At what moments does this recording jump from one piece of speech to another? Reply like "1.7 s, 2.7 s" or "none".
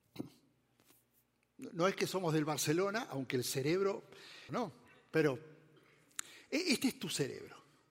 4.5 s